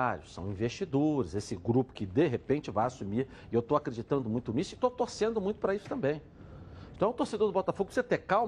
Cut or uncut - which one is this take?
cut